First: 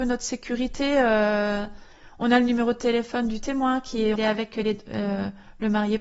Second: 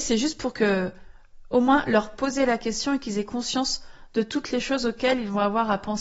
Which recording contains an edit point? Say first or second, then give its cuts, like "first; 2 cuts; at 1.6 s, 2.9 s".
first; 1 cut; at 4.2 s